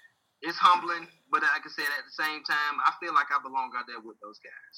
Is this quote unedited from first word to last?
yes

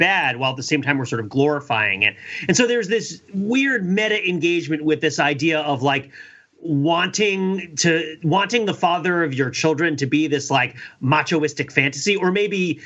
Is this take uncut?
yes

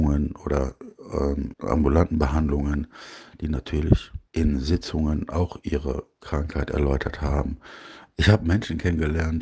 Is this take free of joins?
no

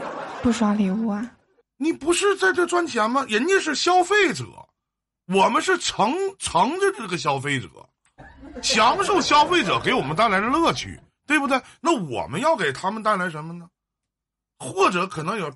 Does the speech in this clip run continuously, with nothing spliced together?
yes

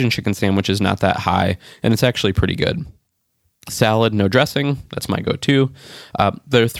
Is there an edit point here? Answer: no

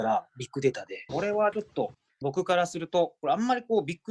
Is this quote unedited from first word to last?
no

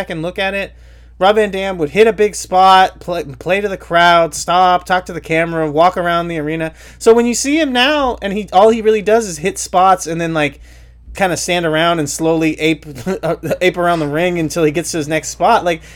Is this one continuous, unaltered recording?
no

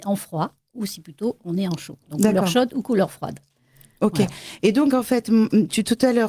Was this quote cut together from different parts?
no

